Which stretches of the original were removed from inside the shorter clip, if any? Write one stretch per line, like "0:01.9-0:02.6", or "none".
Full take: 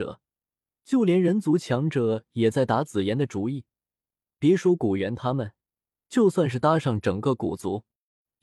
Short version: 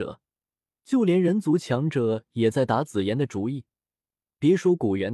none